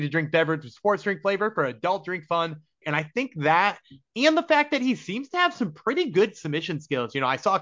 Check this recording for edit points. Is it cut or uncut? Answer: cut